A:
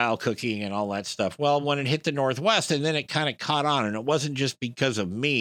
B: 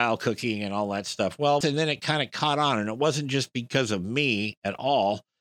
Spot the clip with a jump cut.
B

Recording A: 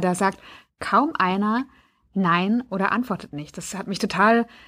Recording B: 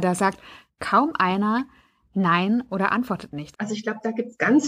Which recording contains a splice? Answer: B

